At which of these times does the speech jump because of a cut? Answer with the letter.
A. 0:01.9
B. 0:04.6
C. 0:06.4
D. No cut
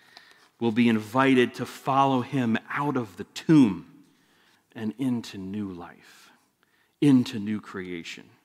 D